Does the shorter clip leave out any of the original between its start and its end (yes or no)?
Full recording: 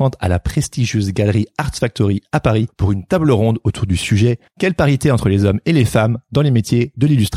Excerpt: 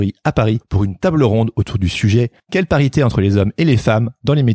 no